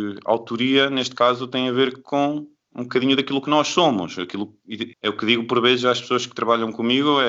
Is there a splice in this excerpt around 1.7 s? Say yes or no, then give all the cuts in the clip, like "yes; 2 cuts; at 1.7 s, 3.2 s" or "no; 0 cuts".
no; 1 cut; at 4.9 s